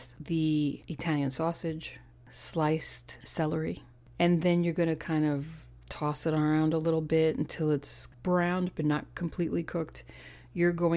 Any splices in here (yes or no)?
no